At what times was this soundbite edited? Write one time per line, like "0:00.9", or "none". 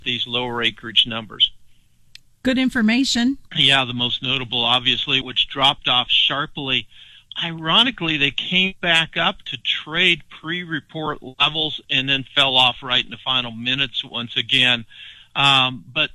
0:03.5
0:05.2